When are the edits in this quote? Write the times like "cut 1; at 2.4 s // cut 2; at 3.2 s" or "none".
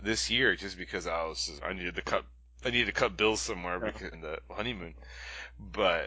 cut 1; at 1.6 s // cut 2; at 4.1 s